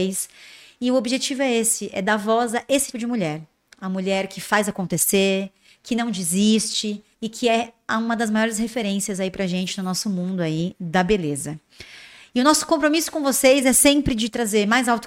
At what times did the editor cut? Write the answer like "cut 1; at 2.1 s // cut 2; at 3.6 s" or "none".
cut 1; at 2.9 s // cut 2; at 7.1 s